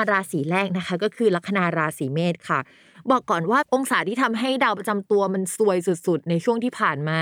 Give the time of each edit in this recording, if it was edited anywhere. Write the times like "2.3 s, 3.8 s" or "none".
none